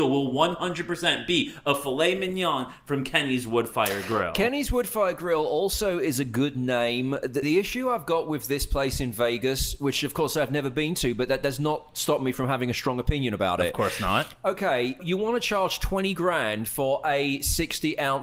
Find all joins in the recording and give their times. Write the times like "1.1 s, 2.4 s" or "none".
7.4 s, 15.0 s